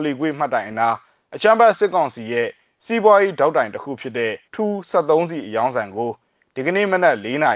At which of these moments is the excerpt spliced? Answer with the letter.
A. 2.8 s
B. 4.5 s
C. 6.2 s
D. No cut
B